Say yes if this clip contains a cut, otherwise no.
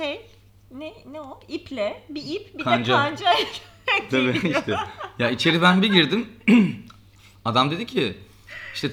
no